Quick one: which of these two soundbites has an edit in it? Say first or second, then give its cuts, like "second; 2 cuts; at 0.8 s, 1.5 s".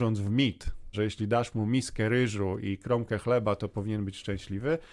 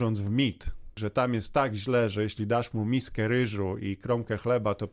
first; 1 cut; at 0.9 s